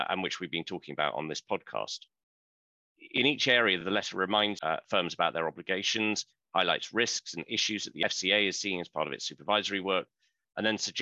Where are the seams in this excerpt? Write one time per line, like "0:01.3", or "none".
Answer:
none